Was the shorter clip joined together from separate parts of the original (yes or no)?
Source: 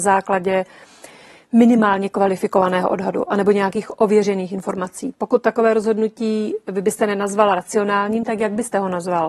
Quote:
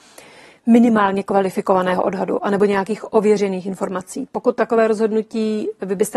no